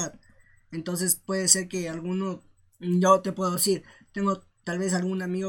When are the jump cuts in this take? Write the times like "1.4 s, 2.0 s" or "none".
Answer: none